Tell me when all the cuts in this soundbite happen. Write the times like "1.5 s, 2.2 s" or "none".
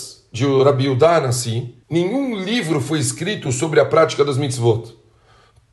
1.8 s